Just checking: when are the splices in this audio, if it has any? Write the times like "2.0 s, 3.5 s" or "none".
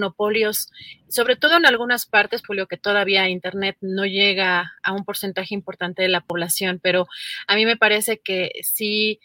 2.4 s